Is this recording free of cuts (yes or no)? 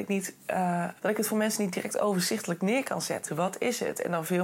no